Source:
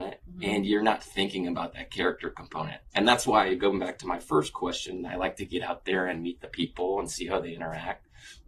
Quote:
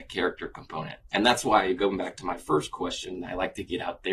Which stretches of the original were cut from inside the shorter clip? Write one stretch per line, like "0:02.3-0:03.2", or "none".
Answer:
none